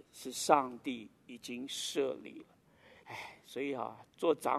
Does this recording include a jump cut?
yes; 1 cut; at 3.0 s

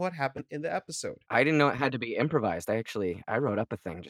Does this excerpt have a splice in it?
no; 0 cuts

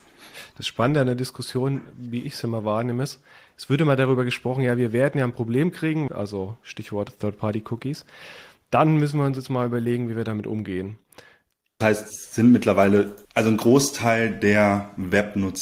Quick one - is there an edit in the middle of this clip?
yes; 3 cuts; at 6.1 s, 11.8 s, 13.2 s

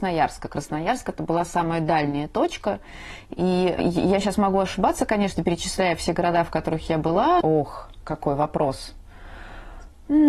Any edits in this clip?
yes; 1 cut; at 7.4 s

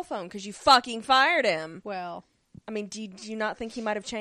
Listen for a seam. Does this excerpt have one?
yes; 1 cut; at 2.6 s

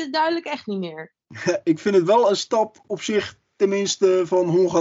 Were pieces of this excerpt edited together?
no; 0 cuts

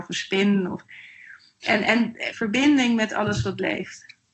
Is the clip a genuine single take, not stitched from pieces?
no; 1 cut; at 2.3 s

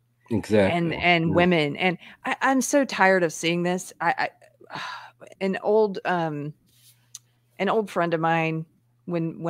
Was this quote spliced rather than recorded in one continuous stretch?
yes; 1 cut; at 5.3 s

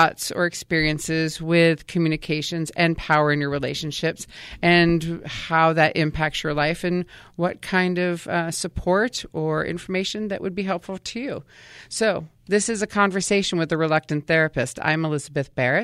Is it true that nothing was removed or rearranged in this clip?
yes; 0 cuts

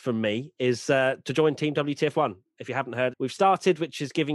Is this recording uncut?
no; 1 cut; at 3.1 s

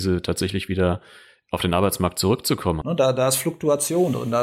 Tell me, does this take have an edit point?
yes; 1 cut; at 2.8 s

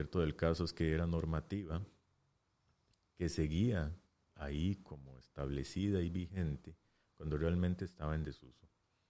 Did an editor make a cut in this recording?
no; 0 cuts

